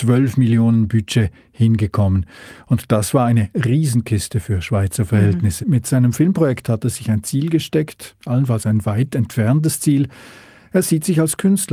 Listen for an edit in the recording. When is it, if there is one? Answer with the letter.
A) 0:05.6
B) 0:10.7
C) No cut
A